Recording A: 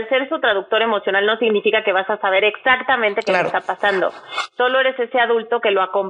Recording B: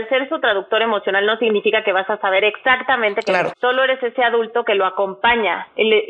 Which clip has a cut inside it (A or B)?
B